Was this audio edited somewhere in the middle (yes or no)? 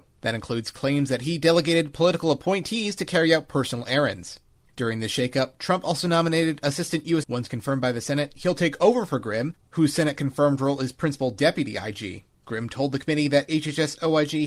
yes